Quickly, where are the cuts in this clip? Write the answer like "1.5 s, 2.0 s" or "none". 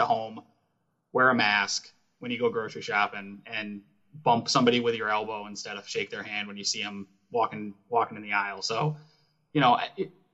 none